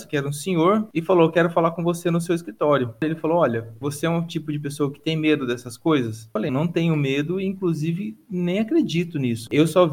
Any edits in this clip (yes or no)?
yes